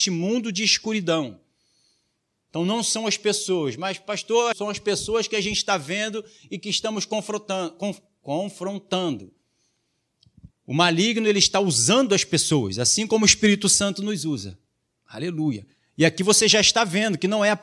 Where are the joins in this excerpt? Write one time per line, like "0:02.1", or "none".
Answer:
0:04.5
0:10.5